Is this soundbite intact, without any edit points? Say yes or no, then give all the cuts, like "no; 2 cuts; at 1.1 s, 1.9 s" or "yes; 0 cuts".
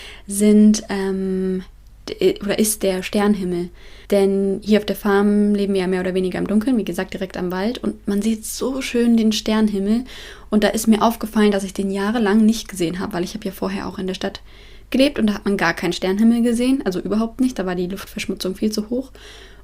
no; 1 cut; at 4.0 s